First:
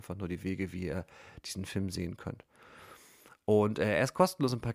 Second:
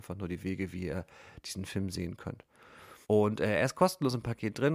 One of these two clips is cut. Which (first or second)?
second